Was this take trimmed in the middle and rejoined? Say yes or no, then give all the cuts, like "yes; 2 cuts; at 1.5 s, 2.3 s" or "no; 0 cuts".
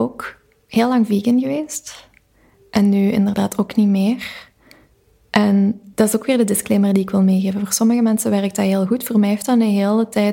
yes; 1 cut; at 5.9 s